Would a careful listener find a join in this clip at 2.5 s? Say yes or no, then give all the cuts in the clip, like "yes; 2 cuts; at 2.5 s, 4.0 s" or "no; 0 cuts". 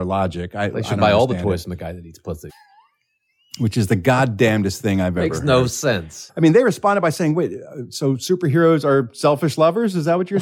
yes; 2 cuts; at 2.5 s, 6.3 s